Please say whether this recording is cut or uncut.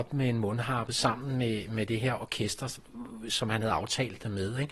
uncut